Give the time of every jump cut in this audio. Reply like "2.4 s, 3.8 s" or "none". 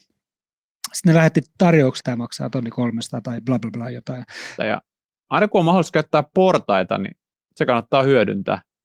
2.0 s, 4.6 s